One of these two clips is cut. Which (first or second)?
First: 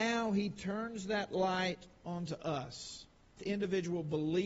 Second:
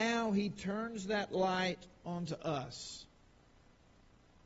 first